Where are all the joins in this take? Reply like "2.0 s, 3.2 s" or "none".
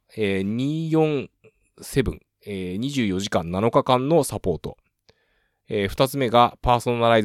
none